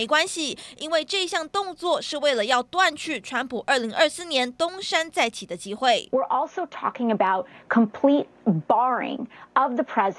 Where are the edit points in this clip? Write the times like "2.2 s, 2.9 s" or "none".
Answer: none